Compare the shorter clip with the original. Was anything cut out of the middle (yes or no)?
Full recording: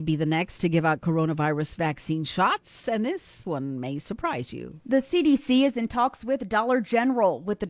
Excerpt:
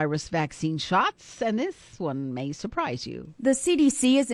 no